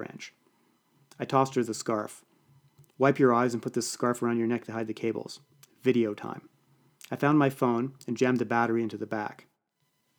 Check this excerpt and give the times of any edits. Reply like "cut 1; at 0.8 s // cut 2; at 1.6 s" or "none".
none